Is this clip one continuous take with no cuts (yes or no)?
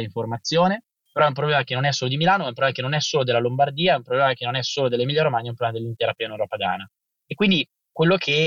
yes